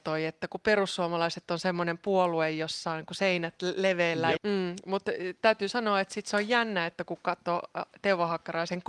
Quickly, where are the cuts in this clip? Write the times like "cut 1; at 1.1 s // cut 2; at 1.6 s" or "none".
cut 1; at 4.4 s